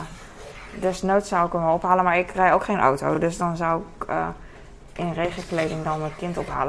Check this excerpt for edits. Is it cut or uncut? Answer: uncut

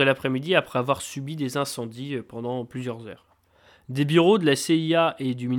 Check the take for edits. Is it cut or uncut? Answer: uncut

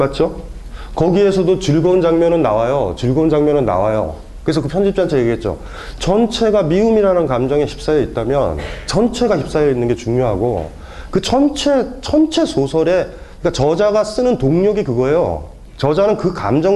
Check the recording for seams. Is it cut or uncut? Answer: uncut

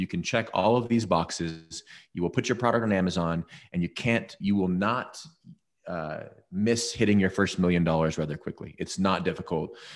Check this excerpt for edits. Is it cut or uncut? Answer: cut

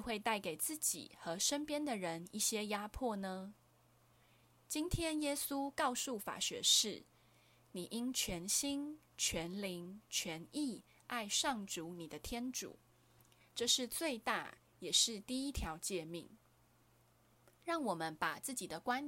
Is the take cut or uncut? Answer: uncut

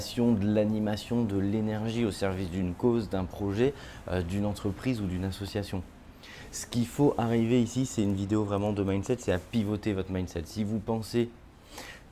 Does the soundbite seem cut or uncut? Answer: uncut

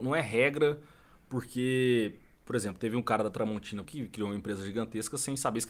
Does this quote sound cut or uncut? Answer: cut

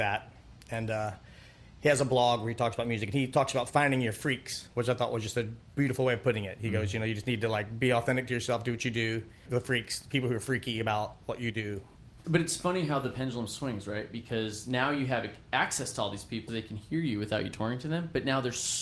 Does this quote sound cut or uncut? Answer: cut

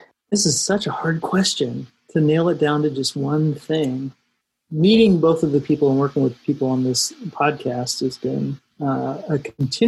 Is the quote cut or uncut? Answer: uncut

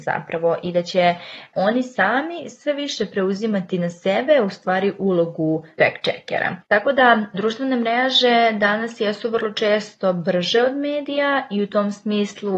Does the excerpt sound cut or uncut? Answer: uncut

